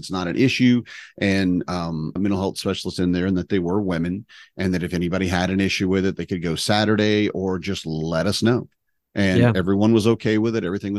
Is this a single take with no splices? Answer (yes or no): no